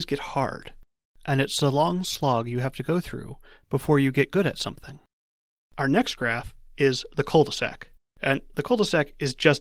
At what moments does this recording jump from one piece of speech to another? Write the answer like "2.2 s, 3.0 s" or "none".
1.0 s